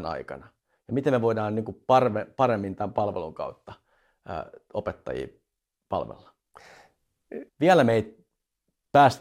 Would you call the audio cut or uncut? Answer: cut